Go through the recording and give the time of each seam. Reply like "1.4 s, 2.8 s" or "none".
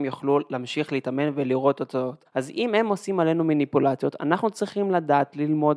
2.2 s